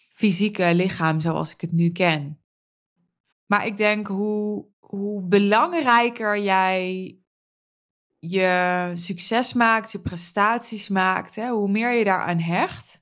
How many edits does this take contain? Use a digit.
2